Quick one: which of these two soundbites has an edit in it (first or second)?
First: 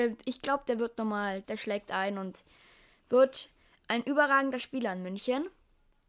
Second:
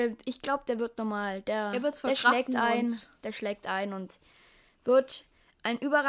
first